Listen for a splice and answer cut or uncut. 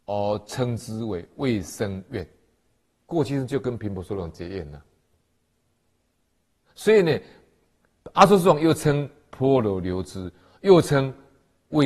uncut